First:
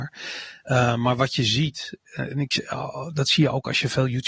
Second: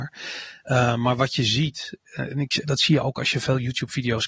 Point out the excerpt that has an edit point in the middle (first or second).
second